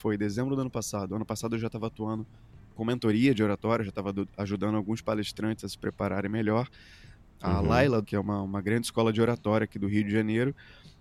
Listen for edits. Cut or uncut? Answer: cut